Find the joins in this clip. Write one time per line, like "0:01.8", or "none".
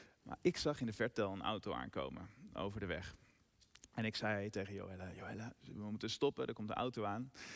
none